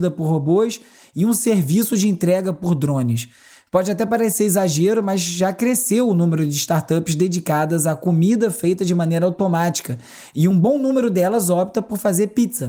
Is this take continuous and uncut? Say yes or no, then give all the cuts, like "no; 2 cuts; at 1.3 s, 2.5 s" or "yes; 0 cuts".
no; 1 cut; at 10.5 s